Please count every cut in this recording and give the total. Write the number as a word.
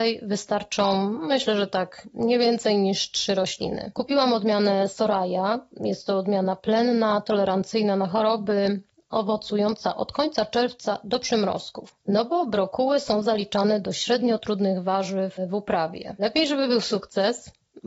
one